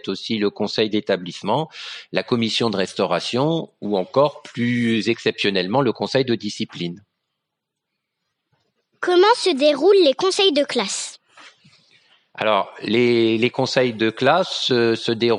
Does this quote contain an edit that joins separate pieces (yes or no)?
no